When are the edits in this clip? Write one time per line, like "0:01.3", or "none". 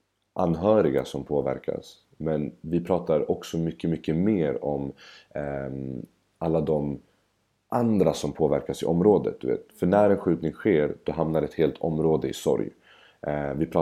none